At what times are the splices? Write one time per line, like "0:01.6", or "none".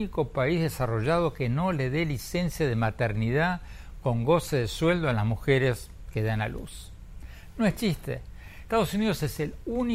none